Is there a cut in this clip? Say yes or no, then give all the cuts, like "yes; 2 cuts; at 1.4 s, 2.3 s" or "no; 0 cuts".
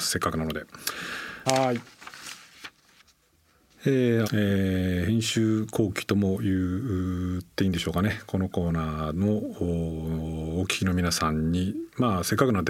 yes; 2 cuts; at 1.5 s, 4.2 s